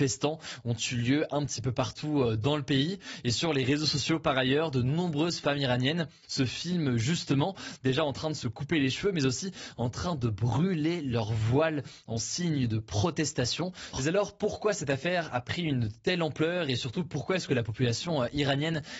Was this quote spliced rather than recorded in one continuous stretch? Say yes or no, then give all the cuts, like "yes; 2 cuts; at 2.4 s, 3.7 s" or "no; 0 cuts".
yes; 1 cut; at 13.9 s